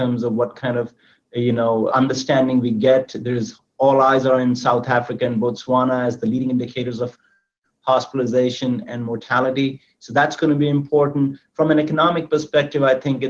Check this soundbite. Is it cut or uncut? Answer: cut